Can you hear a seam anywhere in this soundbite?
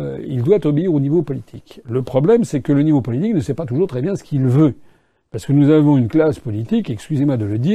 no; 0 cuts

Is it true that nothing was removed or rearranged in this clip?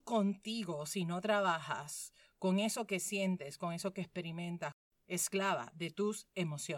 no; 1 cut; at 4.9 s

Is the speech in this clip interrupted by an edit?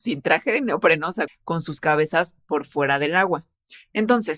yes; 1 cut; at 1.3 s

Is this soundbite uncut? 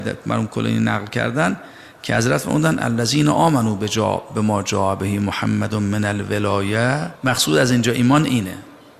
no; 1 cut; at 7.2 s

